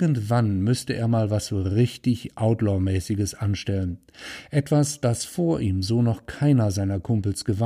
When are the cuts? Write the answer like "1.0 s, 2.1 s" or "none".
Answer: none